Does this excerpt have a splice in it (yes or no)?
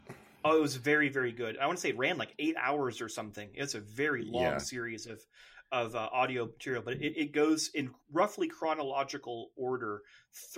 no